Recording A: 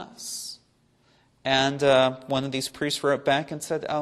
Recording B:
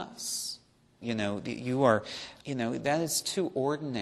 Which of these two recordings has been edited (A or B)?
B